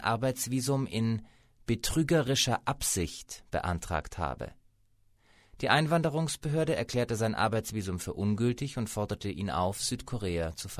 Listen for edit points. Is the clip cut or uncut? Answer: uncut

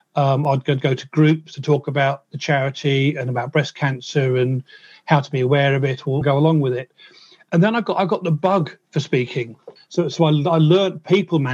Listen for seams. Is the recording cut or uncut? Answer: cut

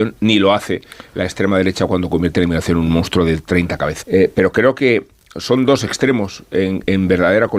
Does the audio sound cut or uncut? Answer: cut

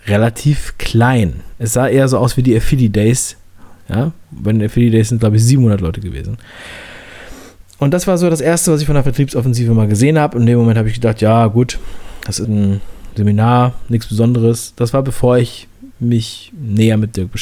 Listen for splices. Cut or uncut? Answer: cut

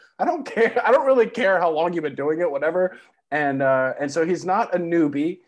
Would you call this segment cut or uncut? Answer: cut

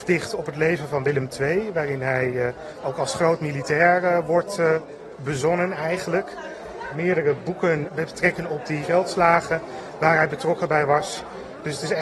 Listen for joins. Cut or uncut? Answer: uncut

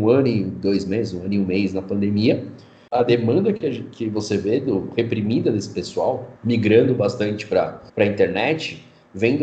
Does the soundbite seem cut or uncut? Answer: cut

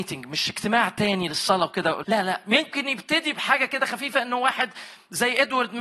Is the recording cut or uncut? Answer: cut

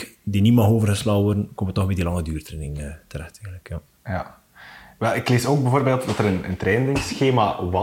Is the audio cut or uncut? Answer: uncut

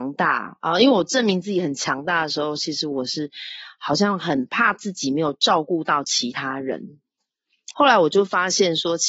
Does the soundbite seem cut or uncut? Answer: cut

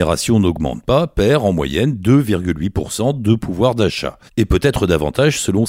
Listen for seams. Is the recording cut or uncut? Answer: cut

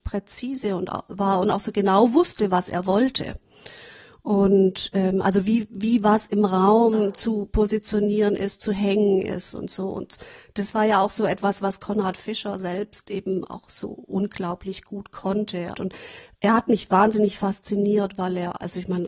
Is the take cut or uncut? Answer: cut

